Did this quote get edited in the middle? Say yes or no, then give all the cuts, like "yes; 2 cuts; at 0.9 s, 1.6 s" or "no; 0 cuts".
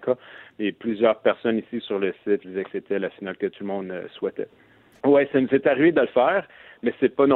yes; 2 cuts; at 2.4 s, 5.0 s